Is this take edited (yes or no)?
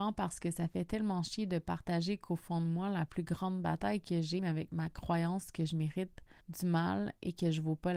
yes